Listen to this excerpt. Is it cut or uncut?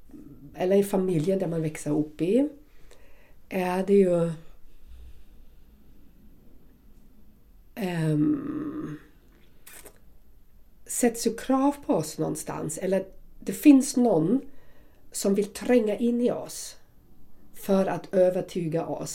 uncut